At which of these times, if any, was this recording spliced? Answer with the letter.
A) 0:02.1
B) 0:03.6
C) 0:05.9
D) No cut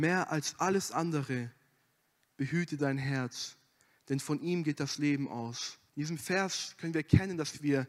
C